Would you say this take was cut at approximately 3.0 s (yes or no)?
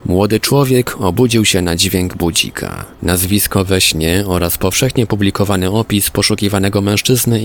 yes